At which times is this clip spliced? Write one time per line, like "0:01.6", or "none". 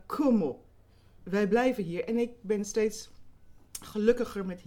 none